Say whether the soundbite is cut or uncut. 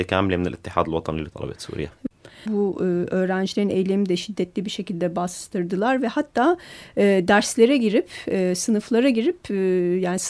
cut